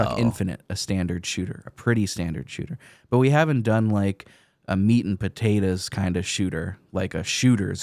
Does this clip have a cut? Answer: no; 0 cuts

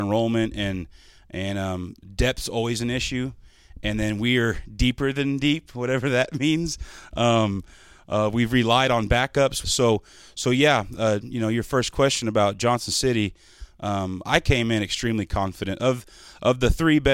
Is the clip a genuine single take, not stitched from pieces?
no; 1 cut; at 9.6 s

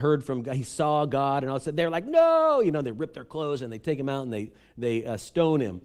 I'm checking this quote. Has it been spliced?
no; 0 cuts

